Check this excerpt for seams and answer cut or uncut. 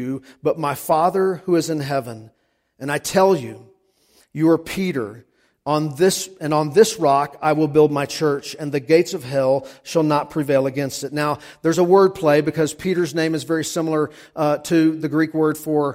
uncut